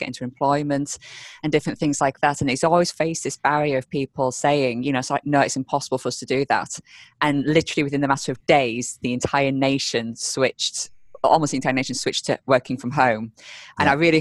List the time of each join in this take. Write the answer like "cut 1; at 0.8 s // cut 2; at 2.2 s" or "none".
none